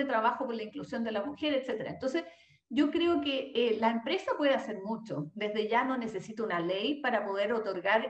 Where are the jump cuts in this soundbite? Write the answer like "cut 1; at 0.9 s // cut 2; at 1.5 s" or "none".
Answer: none